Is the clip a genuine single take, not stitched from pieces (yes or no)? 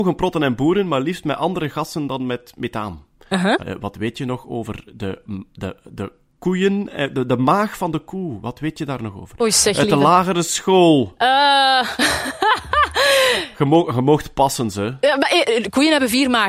no